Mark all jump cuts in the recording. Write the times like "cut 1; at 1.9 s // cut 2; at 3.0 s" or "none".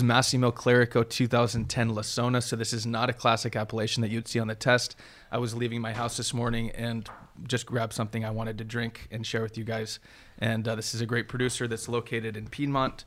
none

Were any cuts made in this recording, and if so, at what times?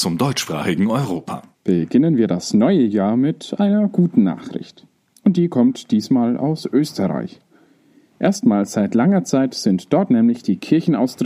cut 1; at 1.5 s

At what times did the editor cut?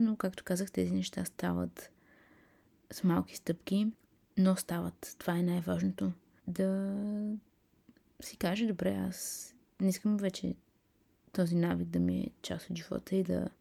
cut 1; at 6.4 s

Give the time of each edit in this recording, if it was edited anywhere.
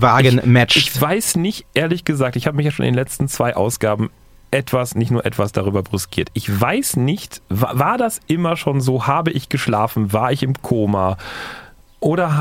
none

